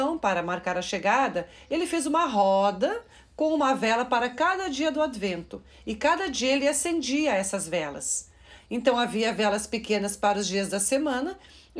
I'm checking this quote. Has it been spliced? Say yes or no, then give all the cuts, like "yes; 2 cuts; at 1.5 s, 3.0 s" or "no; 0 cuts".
no; 0 cuts